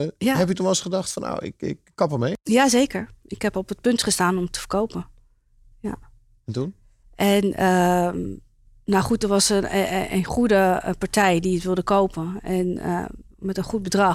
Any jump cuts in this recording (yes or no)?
no